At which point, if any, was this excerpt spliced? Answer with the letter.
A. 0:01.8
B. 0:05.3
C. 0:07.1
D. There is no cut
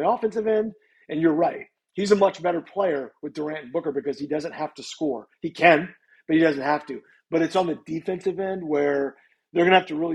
D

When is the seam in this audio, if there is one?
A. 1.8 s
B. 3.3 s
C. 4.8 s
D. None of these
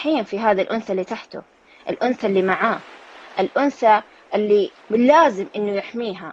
C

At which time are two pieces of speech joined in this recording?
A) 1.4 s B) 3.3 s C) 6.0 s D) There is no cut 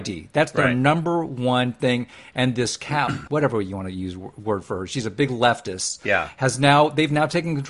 B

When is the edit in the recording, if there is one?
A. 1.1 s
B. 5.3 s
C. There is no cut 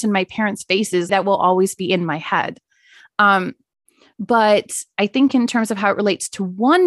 A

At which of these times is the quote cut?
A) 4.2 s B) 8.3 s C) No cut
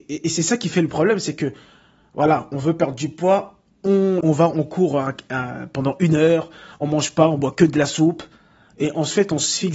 A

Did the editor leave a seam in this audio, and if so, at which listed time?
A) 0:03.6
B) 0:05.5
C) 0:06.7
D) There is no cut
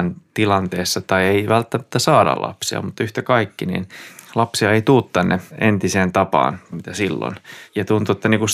C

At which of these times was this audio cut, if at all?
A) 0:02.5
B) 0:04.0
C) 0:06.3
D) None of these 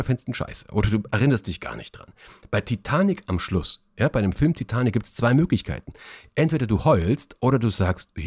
D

